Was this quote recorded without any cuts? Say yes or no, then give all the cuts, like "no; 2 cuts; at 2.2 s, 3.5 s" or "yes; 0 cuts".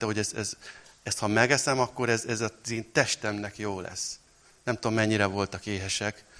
yes; 0 cuts